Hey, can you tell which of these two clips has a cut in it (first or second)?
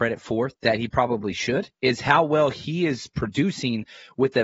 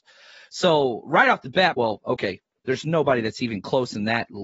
second